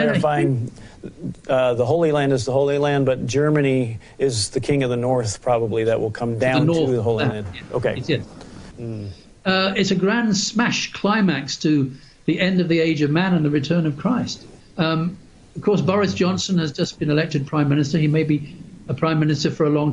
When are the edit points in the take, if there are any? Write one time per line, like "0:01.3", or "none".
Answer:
0:08.7
0:14.6